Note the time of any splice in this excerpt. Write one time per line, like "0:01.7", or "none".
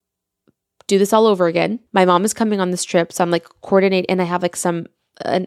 0:01.9